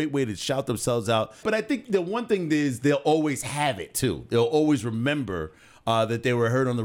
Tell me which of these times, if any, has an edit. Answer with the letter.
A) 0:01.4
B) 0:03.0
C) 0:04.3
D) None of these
A